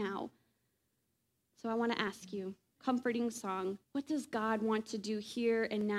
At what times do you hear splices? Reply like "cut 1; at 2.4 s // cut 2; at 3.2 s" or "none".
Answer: cut 1; at 1.5 s // cut 2; at 2.8 s // cut 3; at 3.8 s